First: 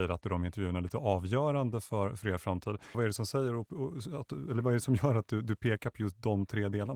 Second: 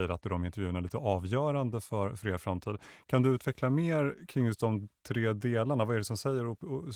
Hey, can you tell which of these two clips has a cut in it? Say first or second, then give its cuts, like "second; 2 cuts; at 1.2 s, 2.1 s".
first; 1 cut; at 2.9 s